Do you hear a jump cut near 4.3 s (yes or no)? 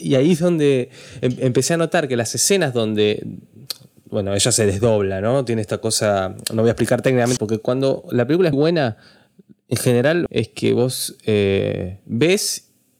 no